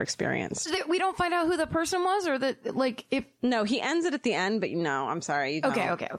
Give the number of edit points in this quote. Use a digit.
0